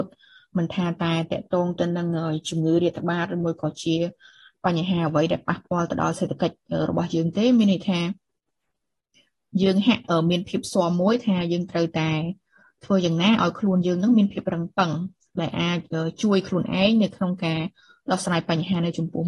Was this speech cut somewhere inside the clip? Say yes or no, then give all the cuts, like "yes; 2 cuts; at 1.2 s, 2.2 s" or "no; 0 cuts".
no; 0 cuts